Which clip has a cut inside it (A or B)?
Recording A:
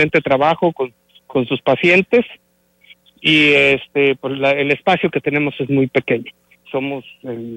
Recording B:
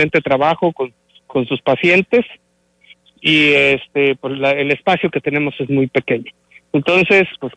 A